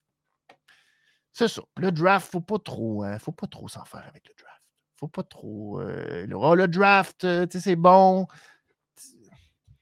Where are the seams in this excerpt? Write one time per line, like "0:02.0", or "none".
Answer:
0:06.3